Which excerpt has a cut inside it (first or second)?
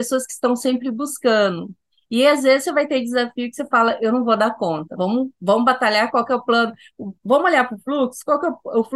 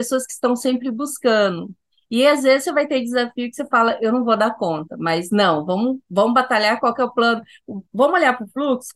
first